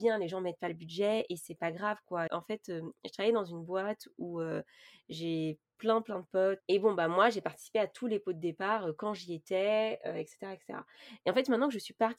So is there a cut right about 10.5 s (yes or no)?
no